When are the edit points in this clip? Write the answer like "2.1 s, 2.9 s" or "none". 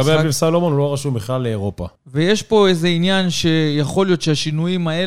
2.0 s